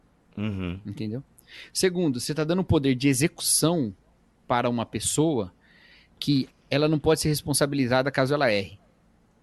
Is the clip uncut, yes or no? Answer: no